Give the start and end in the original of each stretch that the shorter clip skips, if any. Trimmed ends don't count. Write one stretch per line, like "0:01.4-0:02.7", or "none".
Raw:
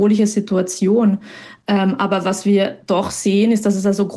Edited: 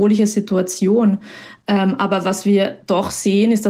none